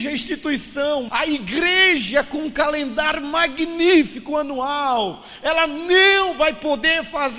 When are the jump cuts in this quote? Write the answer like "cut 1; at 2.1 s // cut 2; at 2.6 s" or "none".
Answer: cut 1; at 1.1 s